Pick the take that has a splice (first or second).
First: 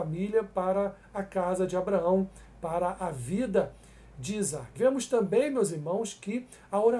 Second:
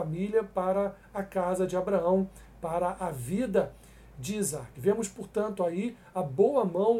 first